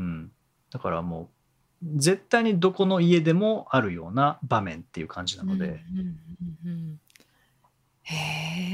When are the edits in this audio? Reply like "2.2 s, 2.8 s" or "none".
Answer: none

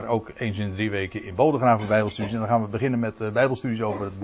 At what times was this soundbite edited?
none

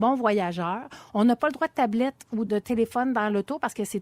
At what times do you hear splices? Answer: 2.4 s

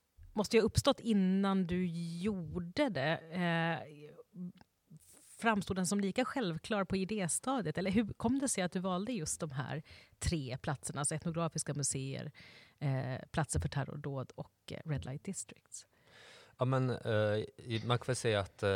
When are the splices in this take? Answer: none

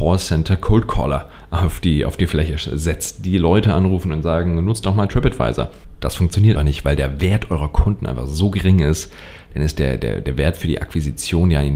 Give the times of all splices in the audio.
6.6 s, 9.5 s

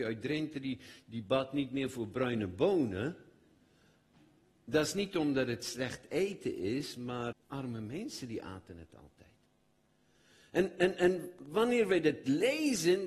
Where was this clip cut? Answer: 7.3 s

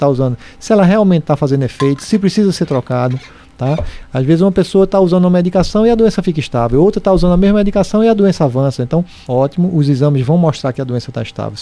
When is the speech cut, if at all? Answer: 9.2 s

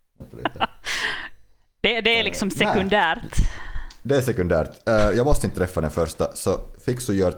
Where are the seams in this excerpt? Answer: none

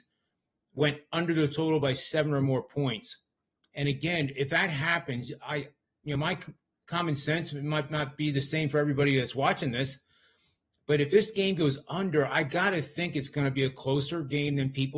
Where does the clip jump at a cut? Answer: none

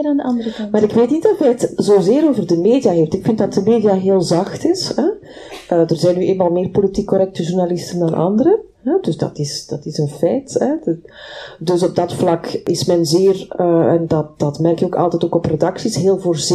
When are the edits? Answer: none

